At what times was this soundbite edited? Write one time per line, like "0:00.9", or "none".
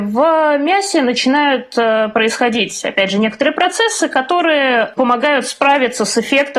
none